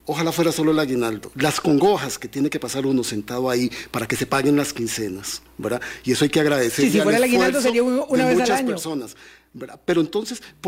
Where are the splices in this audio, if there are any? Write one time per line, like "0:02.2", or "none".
none